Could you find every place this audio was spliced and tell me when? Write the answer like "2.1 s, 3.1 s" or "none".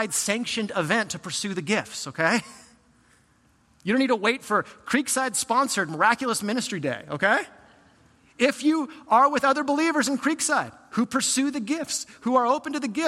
none